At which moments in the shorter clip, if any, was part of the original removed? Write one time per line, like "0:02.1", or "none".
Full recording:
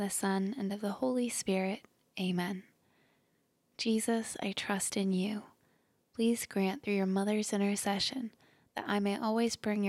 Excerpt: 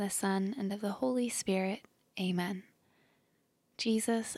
none